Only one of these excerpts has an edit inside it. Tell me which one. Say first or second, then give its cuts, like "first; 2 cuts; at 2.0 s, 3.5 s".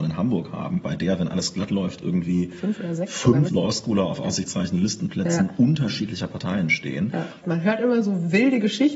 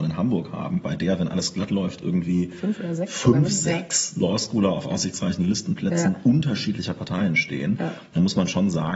first; 2 cuts; at 3.5 s, 7.4 s